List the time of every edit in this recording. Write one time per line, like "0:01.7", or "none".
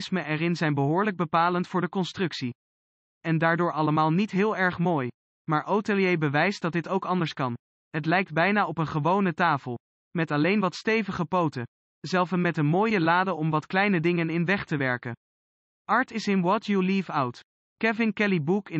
none